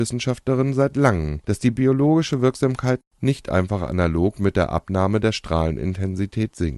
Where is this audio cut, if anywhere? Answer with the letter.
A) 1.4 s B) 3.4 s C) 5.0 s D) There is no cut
A